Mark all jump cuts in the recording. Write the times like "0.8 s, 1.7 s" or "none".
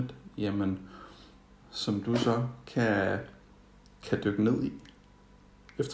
1.6 s